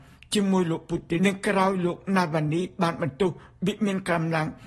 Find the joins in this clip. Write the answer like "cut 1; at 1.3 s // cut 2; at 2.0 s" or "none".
cut 1; at 1.2 s